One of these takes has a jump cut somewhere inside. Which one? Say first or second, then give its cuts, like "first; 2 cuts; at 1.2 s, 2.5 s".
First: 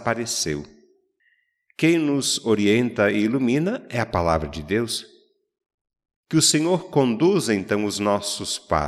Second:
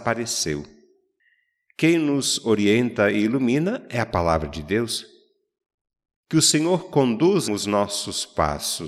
second; 1 cut; at 7.5 s